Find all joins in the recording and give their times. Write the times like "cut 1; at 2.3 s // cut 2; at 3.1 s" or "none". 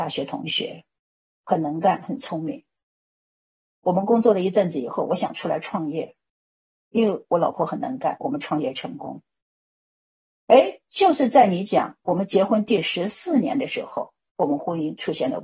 none